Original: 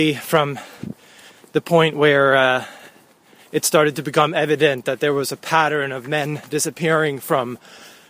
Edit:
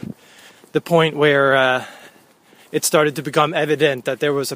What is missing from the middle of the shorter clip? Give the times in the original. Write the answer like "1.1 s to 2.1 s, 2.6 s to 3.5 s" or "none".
none